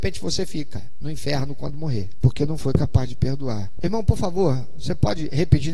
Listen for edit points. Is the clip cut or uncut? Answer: cut